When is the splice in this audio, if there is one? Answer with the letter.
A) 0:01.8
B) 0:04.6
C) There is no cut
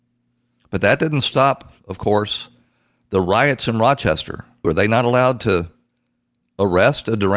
B